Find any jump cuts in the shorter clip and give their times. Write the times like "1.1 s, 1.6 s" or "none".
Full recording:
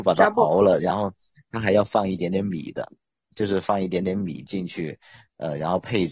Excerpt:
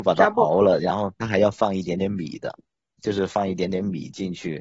1.1 s